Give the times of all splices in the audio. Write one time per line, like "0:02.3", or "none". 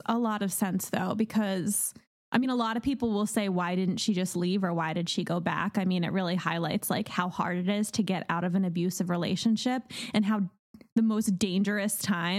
none